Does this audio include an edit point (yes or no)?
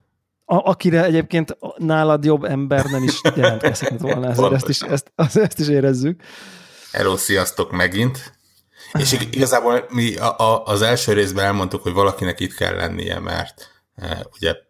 yes